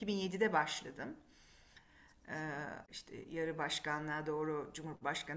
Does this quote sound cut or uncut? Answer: cut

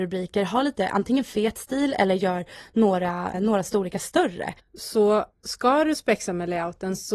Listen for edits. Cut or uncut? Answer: cut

